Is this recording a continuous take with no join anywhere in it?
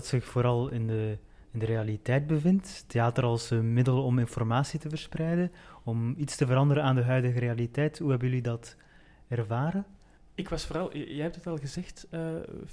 yes; 0 cuts

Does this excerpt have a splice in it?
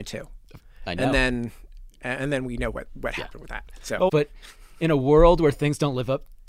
yes; 1 cut; at 4.1 s

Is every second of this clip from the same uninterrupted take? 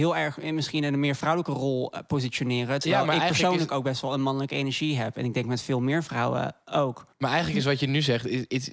yes; 0 cuts

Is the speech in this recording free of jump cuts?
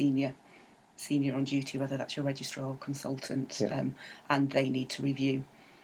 yes; 0 cuts

